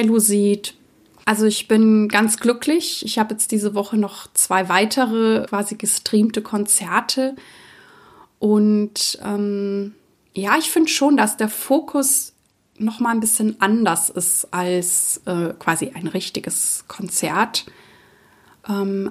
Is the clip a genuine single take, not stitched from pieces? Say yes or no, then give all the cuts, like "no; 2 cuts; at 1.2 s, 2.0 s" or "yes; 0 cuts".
no; 1 cut; at 1.2 s